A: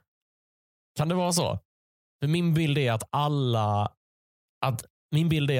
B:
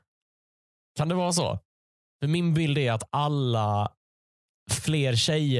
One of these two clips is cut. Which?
B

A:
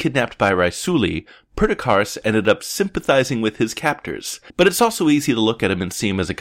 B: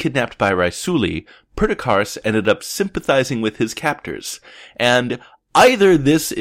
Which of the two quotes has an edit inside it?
A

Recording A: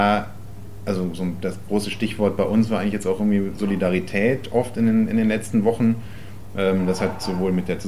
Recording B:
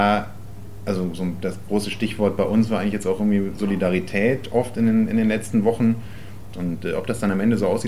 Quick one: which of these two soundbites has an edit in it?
B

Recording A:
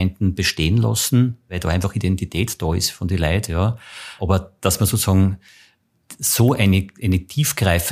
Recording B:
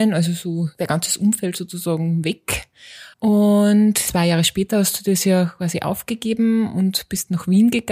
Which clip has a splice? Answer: B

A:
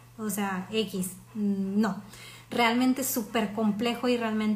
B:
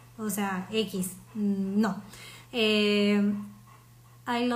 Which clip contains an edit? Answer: B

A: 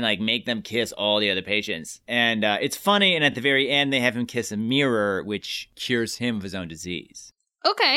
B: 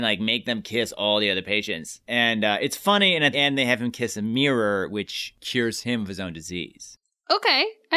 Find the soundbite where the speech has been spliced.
B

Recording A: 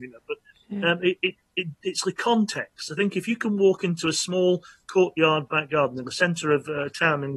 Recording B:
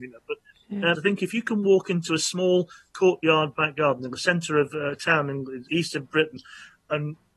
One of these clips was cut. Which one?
B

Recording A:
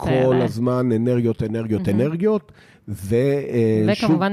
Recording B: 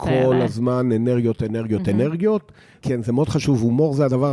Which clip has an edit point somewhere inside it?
B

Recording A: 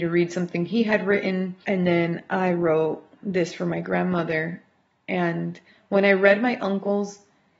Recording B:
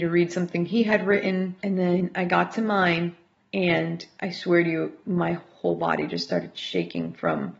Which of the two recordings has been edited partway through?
B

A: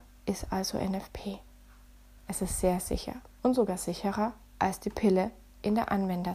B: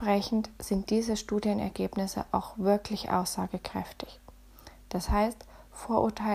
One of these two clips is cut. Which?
A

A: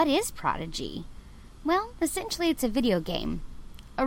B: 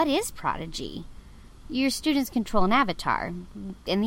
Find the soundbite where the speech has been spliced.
B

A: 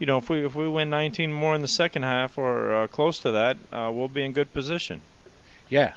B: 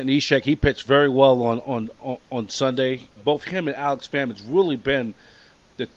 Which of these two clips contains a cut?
B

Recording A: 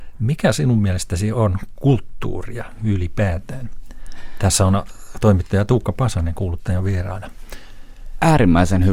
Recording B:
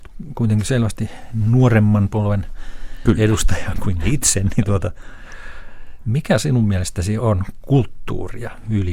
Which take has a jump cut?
B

